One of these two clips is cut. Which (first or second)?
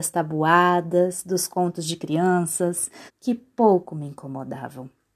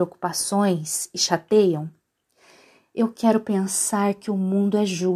first